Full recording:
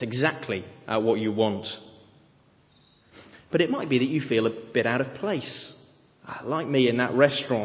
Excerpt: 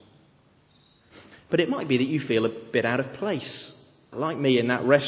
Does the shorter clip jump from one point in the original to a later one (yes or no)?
yes